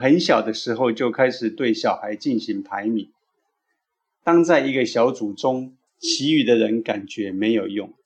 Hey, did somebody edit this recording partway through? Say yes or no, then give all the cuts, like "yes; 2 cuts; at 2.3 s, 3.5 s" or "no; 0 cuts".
yes; 1 cut; at 5.9 s